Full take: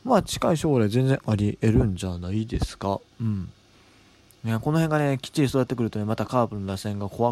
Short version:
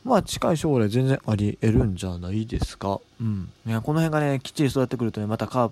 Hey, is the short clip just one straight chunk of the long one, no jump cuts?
no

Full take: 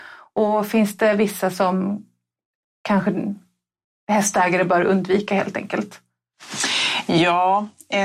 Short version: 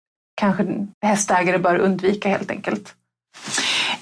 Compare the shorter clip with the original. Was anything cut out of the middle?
yes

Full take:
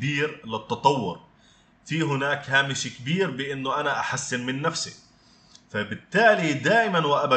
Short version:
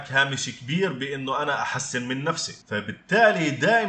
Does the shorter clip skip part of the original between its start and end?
yes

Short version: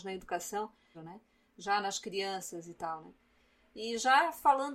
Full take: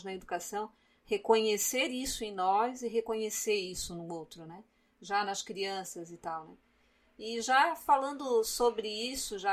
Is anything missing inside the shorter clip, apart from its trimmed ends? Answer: yes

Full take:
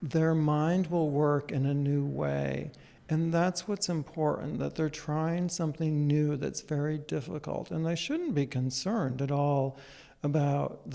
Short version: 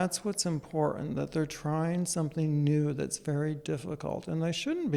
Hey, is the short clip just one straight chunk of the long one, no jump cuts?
yes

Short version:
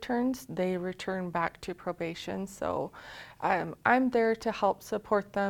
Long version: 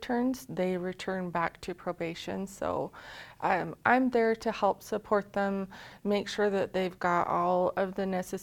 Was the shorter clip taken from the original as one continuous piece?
yes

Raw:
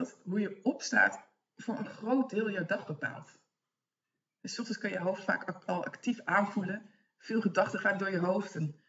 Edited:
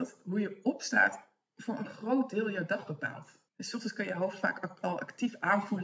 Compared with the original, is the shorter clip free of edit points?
no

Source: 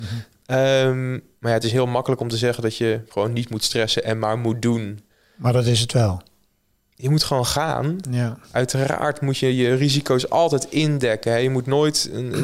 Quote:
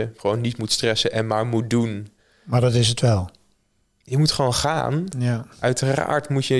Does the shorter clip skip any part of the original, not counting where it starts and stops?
no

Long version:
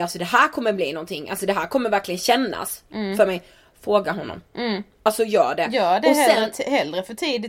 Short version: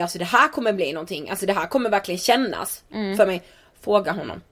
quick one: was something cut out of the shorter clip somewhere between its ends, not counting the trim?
no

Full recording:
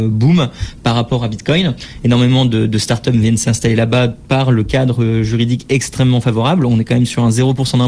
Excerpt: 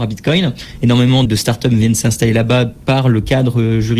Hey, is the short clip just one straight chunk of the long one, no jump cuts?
no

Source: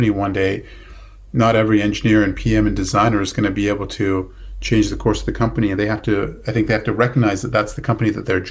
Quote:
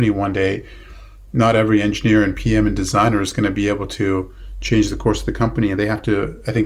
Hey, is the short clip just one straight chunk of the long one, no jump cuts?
yes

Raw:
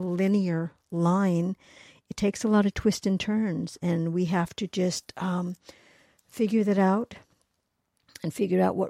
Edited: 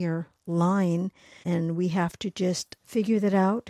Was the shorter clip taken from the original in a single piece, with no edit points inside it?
no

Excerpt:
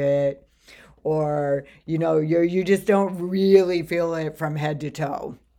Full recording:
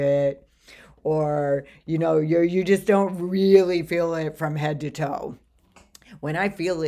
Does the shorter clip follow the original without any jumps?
yes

